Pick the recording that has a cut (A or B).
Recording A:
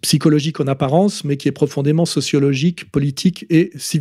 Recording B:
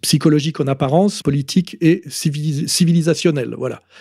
B